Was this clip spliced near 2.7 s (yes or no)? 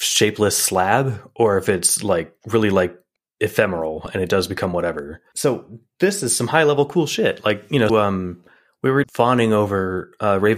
no